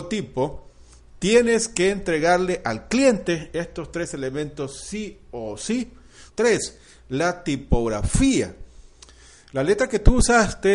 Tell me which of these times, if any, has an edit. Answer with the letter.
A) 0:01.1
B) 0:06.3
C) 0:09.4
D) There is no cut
B